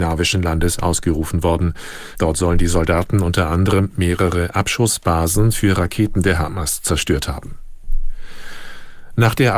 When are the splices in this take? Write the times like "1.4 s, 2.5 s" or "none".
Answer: 2.1 s